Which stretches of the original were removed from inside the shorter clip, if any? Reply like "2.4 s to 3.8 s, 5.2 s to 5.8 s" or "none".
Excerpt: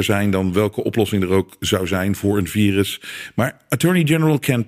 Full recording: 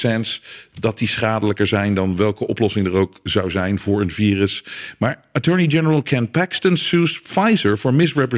none